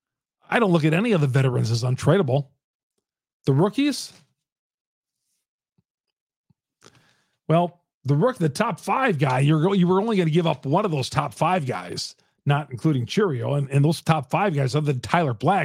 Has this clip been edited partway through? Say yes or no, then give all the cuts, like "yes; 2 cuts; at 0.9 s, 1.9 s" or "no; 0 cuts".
no; 0 cuts